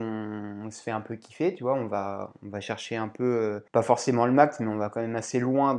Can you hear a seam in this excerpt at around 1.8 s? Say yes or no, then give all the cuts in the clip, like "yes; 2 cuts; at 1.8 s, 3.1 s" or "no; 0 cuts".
no; 1 cut; at 3.7 s